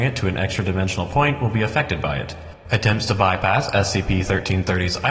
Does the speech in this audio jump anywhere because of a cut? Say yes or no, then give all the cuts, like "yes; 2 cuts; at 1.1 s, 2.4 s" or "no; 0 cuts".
no; 0 cuts